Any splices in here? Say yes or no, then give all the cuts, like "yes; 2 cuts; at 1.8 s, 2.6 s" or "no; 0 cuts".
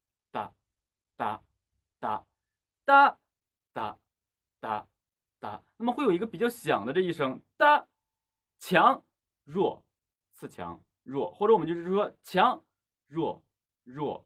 no; 0 cuts